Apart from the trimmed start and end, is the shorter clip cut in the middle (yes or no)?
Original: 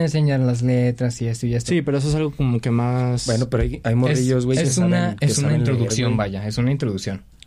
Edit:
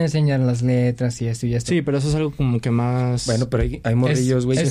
no